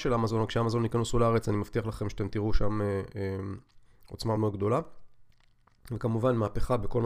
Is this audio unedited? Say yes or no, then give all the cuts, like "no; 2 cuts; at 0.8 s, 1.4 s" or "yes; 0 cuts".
no; 1 cut; at 4.4 s